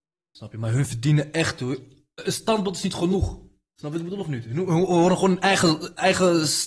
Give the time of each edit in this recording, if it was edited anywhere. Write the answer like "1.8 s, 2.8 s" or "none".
none